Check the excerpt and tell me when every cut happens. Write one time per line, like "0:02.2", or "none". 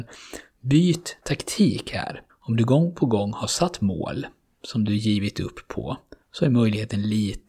0:02.3
0:06.2